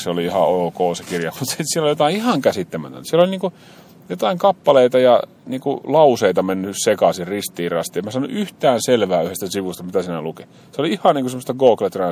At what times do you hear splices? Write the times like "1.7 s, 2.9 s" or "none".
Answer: none